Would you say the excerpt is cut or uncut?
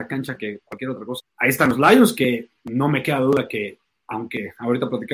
cut